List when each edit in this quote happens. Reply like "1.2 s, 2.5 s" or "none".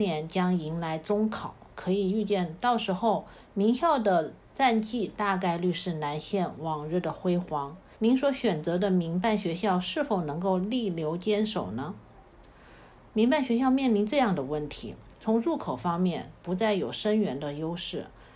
7.9 s